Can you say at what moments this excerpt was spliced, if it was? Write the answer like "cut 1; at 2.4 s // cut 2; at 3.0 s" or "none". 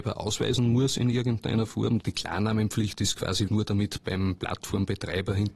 cut 1; at 2.0 s // cut 2; at 3.5 s